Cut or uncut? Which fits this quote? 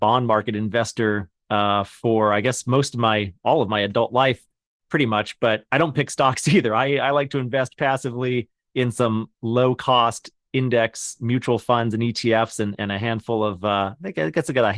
uncut